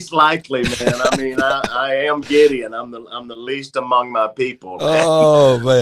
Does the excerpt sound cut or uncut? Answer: uncut